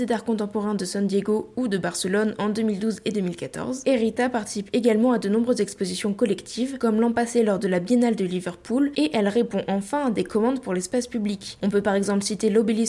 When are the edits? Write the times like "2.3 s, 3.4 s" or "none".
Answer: none